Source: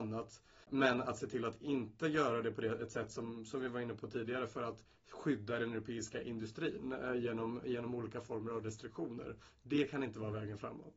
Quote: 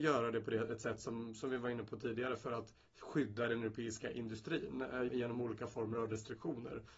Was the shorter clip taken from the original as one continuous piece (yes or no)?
no